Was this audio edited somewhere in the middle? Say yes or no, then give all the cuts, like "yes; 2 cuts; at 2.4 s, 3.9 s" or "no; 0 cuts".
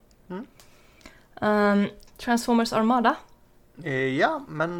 yes; 1 cut; at 2.1 s